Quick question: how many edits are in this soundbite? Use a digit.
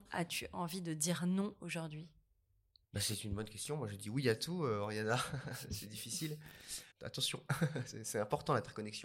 1